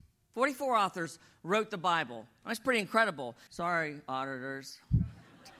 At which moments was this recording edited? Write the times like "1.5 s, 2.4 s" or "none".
3.5 s